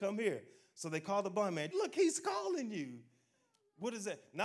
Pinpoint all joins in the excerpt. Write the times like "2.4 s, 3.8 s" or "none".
1.7 s